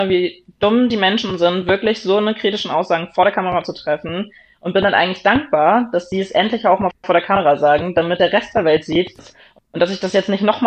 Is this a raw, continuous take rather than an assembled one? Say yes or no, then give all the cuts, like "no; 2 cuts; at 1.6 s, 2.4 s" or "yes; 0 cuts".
no; 1 cut; at 9.2 s